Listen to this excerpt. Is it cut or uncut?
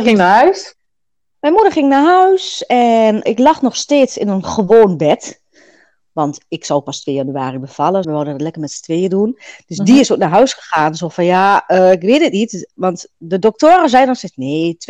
cut